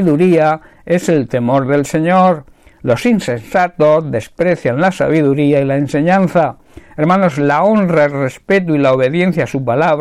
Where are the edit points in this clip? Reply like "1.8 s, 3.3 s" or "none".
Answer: none